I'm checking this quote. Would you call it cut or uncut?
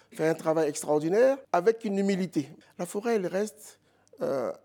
cut